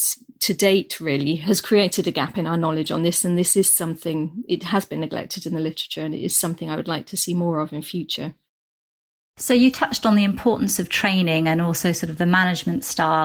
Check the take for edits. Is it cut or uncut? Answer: uncut